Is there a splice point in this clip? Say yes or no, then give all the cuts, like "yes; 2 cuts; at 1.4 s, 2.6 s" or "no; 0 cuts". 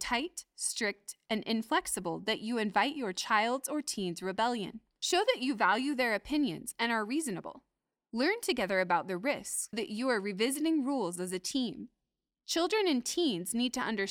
yes; 1 cut; at 9.7 s